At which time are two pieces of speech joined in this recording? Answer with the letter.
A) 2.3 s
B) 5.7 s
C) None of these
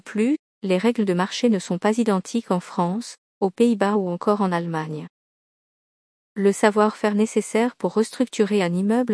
C